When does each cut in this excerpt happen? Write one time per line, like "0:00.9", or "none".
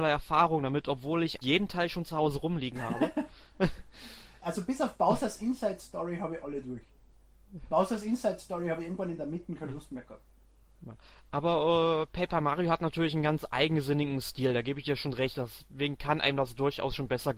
0:01.4